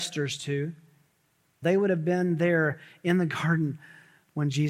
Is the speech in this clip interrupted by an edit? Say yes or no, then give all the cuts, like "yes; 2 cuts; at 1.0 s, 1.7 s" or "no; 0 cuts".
yes; 1 cut; at 1.6 s